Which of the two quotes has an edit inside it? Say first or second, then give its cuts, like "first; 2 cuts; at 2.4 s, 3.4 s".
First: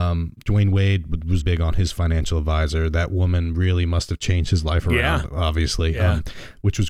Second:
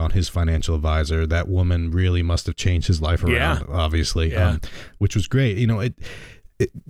first; 1 cut; at 1.4 s